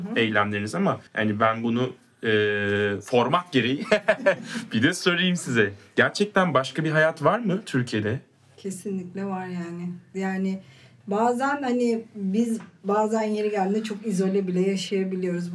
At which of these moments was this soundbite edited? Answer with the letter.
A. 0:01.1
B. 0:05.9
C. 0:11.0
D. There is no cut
A